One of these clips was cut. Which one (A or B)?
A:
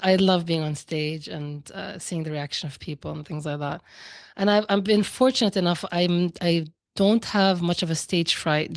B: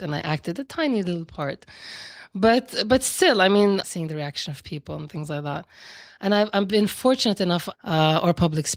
B